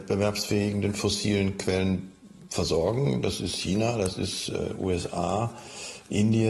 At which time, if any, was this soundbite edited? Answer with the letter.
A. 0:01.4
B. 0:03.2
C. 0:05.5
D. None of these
D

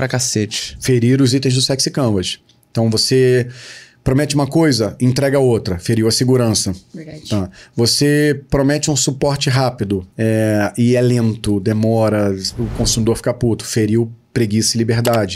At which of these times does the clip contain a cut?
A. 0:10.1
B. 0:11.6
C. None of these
A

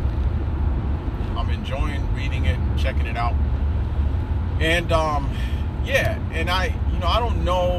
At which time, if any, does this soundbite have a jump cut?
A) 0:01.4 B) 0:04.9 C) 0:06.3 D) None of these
A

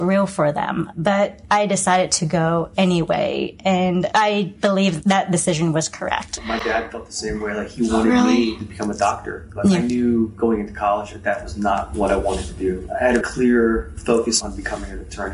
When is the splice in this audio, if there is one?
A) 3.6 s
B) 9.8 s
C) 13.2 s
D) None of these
C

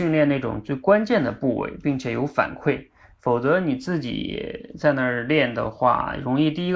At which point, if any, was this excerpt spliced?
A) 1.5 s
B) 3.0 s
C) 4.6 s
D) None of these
D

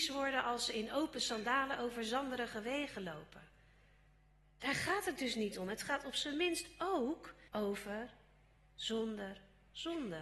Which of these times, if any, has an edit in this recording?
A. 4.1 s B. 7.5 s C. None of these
B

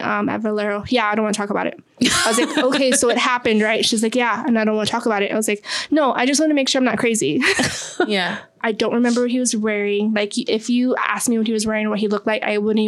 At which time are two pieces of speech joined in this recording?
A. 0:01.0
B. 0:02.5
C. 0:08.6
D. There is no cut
C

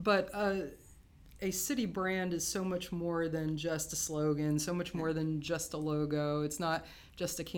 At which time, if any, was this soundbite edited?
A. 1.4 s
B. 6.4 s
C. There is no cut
C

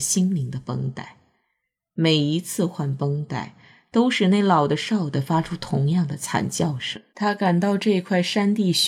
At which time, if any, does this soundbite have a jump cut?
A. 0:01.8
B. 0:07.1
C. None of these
B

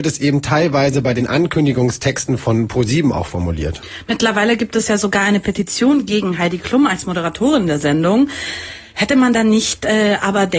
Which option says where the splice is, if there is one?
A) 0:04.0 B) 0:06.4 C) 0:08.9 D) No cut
D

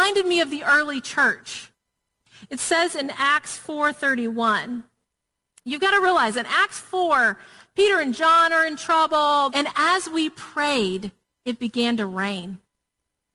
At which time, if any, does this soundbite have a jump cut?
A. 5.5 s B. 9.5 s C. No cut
B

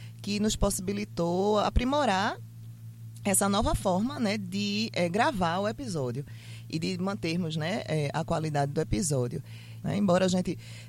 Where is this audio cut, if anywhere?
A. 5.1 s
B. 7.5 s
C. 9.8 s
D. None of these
C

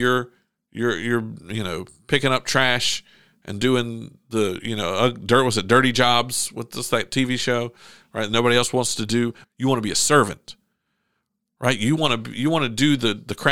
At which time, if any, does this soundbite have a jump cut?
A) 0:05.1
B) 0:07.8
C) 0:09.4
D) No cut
C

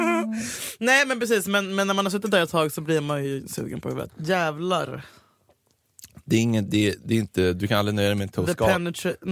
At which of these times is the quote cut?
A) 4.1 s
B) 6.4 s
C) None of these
A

